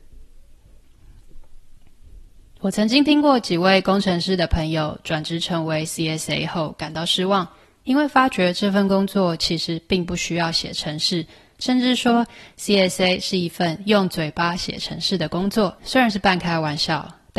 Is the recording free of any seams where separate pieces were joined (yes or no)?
yes